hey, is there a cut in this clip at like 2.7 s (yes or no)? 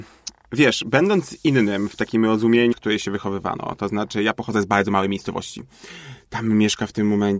yes